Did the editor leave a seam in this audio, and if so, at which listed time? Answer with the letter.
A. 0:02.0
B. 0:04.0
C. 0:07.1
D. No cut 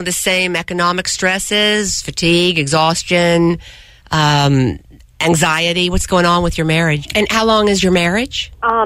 D